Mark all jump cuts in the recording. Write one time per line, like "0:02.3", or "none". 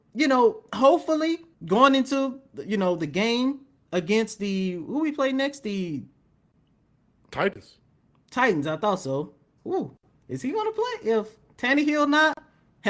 0:01.5
0:09.6